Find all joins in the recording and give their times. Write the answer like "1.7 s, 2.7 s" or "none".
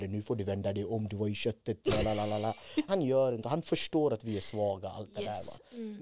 2.9 s